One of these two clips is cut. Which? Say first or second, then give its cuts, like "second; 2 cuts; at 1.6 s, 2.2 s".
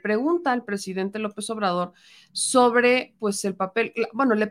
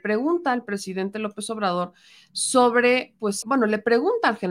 second; 1 cut; at 3.4 s